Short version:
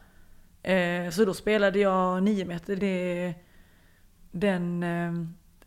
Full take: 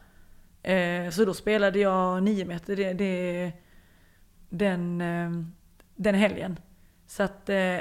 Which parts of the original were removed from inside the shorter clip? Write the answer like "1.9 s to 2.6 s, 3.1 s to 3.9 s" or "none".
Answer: 2.8 s to 2.9 s